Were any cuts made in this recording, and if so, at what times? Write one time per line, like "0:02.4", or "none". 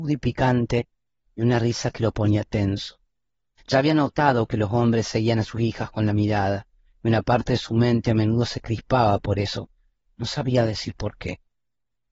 0:03.6